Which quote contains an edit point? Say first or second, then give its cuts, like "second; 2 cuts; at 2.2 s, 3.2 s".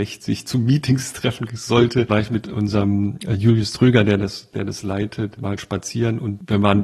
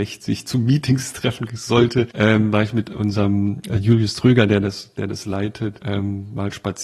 first; 2 cuts; at 2.1 s, 5.4 s